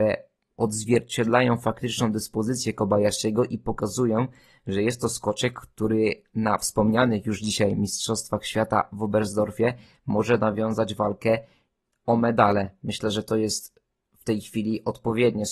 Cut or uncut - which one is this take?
uncut